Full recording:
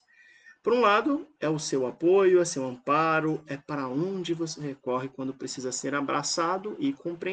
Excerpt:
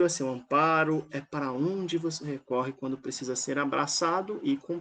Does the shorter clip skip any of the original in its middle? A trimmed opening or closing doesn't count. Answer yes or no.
no